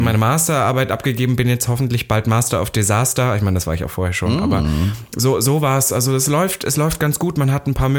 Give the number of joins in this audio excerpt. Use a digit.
0